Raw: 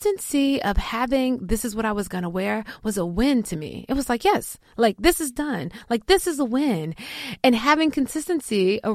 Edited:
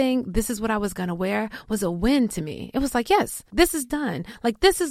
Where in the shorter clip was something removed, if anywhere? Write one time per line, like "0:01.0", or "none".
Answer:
0:03.5